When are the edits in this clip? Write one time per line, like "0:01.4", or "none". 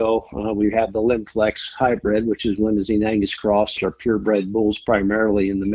0:03.8